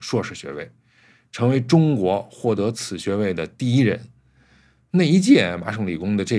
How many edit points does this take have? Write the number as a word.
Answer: zero